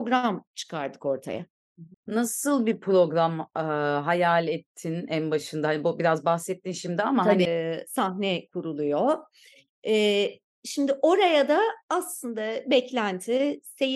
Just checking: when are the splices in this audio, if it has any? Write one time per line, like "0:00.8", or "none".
0:01.9
0:07.5